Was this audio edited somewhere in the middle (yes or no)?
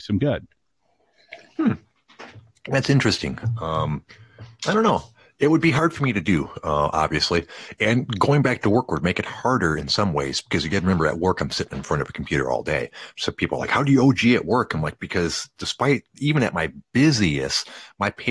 no